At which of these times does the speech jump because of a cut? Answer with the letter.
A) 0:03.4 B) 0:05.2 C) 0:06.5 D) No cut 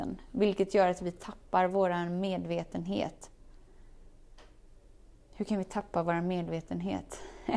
D